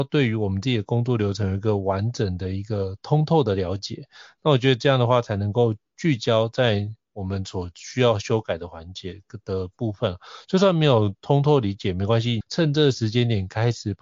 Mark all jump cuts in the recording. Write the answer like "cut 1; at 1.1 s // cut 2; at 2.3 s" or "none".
cut 1; at 12.4 s